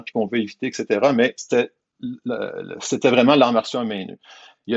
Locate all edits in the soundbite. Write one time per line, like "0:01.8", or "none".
none